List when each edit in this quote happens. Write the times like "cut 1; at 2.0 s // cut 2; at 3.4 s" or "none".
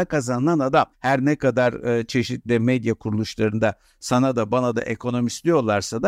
cut 1; at 0.9 s